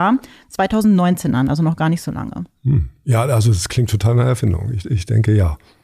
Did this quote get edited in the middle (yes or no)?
no